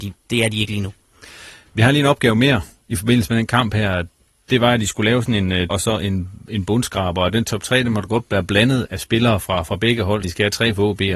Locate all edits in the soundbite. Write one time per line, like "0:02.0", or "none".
0:05.7
0:08.8
0:10.2